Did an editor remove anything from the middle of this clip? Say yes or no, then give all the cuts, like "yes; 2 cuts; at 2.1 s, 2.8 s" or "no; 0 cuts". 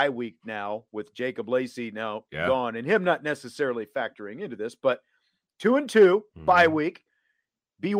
yes; 1 cut; at 6.3 s